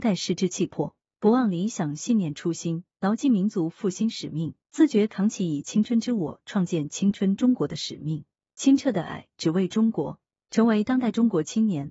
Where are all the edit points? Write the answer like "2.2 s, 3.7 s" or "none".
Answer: 4.6 s